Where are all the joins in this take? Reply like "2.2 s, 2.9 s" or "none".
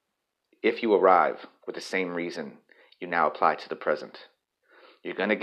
none